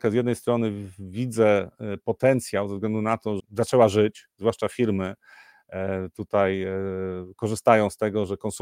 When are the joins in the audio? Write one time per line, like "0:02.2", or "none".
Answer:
0:03.4